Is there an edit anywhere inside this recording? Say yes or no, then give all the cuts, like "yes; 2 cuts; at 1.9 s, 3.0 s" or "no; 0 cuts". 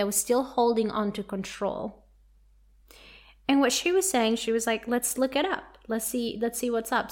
no; 0 cuts